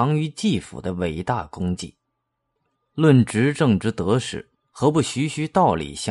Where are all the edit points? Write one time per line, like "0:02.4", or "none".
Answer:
0:02.6